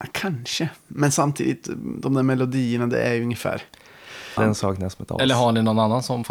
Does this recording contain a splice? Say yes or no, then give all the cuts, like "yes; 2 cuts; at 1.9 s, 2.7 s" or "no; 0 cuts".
yes; 1 cut; at 4.4 s